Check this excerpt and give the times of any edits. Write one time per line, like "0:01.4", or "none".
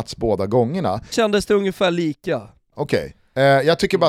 0:01.1
0:02.7